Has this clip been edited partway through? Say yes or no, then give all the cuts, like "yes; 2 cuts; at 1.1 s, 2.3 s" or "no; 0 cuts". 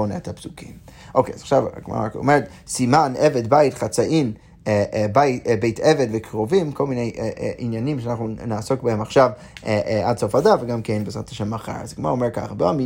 no; 0 cuts